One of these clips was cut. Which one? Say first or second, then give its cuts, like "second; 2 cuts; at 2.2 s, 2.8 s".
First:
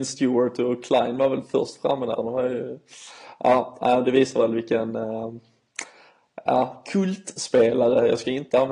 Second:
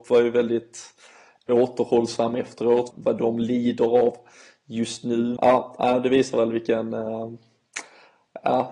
second; 2 cuts; at 2.9 s, 5.4 s